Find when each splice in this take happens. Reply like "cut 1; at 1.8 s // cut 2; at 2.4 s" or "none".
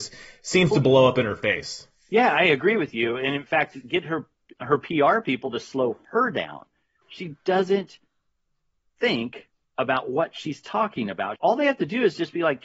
cut 1; at 7.0 s // cut 2; at 11.4 s